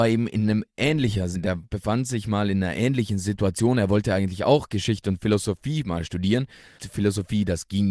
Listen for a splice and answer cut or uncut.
cut